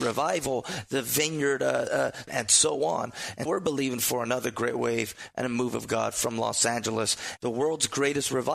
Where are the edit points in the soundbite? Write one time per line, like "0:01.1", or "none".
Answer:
0:02.3
0:03.5
0:07.4